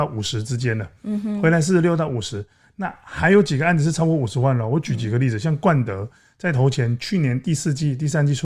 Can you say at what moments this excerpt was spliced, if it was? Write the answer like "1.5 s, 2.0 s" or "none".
none